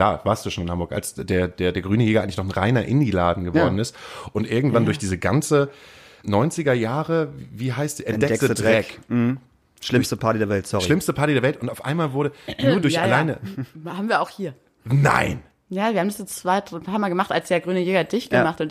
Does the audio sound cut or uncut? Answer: cut